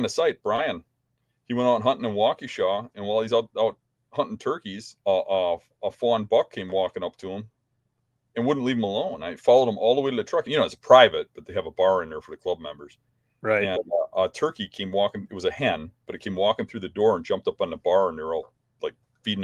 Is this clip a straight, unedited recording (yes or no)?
no